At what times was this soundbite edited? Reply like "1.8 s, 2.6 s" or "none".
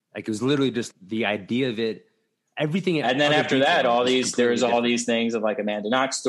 0.9 s, 3.0 s